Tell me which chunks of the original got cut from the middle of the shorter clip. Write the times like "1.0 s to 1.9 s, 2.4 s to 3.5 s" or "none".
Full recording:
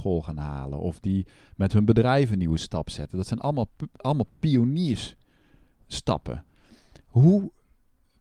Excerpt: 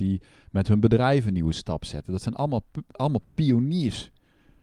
none